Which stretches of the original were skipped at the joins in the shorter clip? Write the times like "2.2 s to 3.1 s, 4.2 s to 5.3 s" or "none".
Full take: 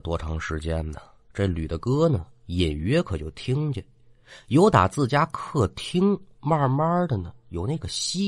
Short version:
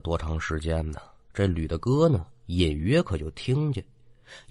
none